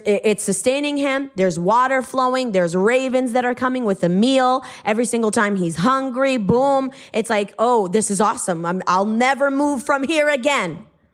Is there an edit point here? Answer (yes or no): no